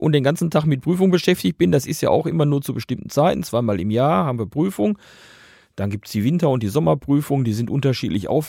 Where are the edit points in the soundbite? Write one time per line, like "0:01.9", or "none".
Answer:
none